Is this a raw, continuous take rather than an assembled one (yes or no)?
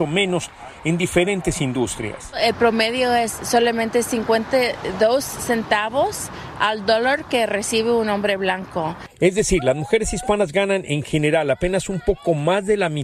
yes